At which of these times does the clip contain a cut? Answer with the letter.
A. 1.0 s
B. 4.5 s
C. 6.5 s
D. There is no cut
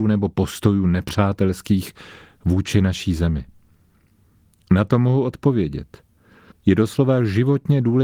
C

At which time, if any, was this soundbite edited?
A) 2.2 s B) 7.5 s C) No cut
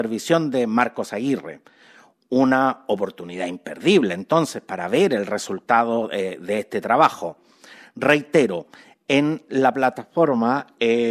C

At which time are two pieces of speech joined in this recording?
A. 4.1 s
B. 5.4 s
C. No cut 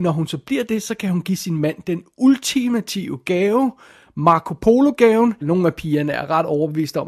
B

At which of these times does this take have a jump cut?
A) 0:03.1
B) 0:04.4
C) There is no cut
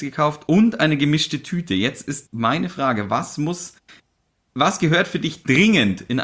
C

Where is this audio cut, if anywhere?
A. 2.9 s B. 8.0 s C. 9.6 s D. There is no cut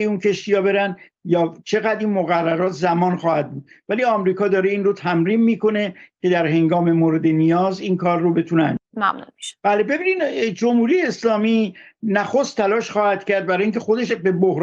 C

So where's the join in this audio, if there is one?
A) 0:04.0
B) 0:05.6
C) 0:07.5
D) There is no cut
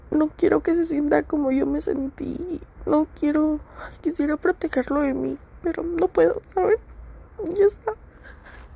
A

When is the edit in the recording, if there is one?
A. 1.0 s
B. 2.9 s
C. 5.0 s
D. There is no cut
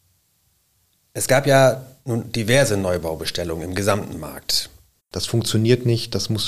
C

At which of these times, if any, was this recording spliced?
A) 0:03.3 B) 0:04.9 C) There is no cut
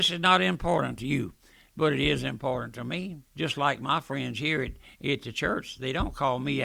A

